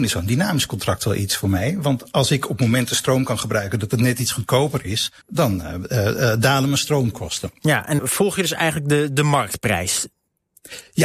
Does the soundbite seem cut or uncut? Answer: cut